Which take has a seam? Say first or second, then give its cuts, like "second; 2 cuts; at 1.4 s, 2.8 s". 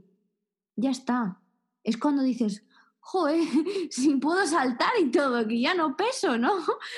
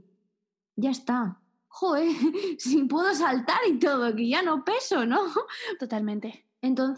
second; 2 cuts; at 1.6 s, 5.8 s